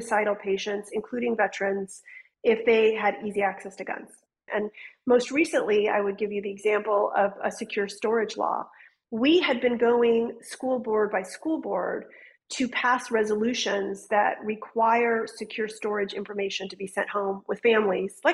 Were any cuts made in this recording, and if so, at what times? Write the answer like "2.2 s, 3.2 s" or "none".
4.5 s